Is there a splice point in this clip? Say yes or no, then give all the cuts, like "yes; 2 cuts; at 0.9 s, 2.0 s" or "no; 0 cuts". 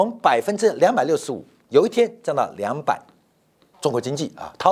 yes; 1 cut; at 3.7 s